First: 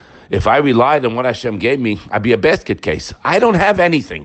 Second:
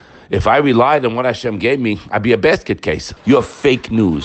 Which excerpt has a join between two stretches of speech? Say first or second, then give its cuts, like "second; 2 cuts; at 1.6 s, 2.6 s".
second; 1 cut; at 3.2 s